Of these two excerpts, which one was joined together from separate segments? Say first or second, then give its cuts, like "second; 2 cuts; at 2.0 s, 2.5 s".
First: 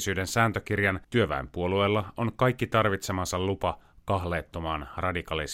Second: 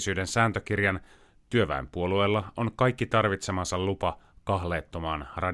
first; 1 cut; at 1.0 s